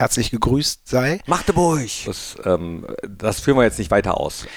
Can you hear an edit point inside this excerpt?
yes; 1 cut; at 2.1 s

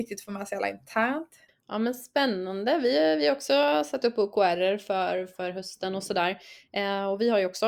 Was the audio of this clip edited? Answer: yes; 1 cut; at 1.5 s

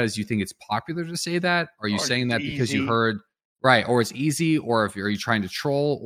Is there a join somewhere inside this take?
no; 0 cuts

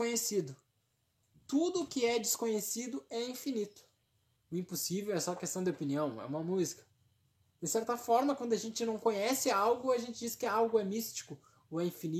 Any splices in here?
yes; 1 cut; at 4.4 s

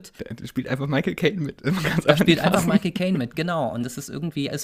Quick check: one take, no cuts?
yes; 0 cuts

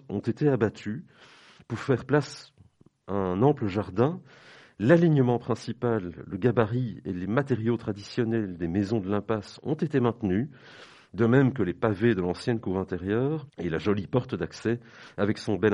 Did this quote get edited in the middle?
yes; 1 cut; at 13.5 s

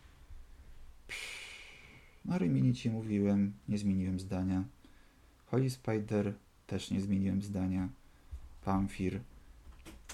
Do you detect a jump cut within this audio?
no; 0 cuts

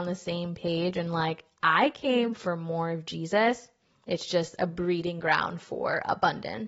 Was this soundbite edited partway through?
no; 0 cuts

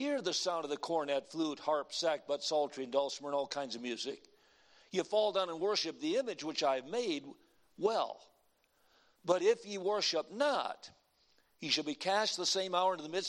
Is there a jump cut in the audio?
no; 0 cuts

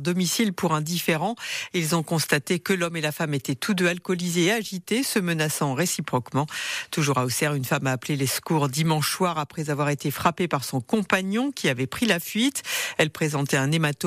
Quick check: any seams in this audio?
no; 0 cuts

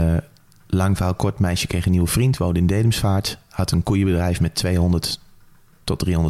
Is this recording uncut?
yes; 0 cuts

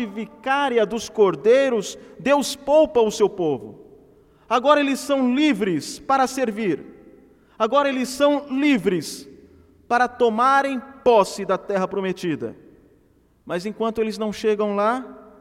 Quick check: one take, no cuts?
yes; 0 cuts

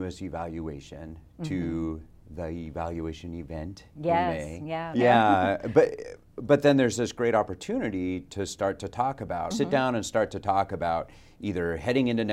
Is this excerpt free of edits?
no; 2 cuts; at 4.9 s, 9.5 s

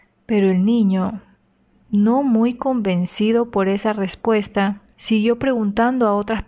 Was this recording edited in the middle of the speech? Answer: no; 0 cuts

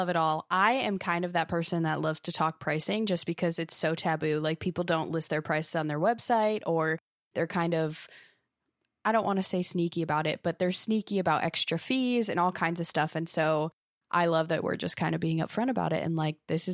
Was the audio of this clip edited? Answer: no; 0 cuts

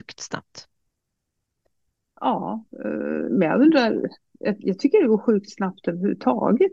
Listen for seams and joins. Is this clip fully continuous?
yes; 0 cuts

